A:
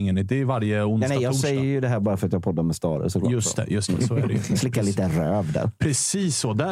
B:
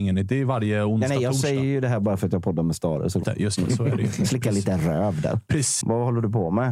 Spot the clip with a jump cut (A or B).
B